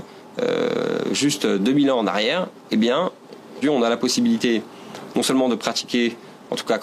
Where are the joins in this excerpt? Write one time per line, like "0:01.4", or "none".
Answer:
0:03.6